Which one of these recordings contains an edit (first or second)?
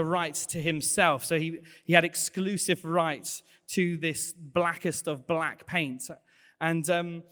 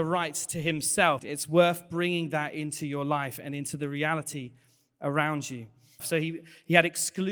second